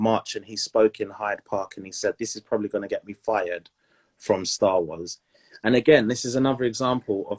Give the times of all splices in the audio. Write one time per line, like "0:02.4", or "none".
0:05.5